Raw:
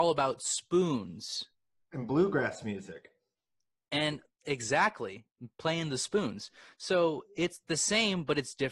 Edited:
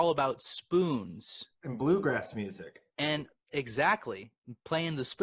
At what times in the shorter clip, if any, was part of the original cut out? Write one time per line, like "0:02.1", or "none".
0:01.6
0:02.9